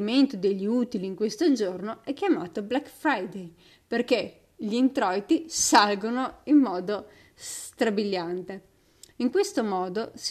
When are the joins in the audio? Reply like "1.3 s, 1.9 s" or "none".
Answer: 9.1 s